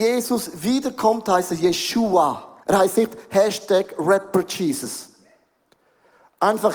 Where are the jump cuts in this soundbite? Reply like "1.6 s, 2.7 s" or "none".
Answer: 2.6 s